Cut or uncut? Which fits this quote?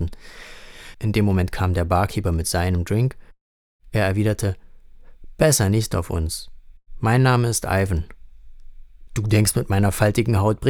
cut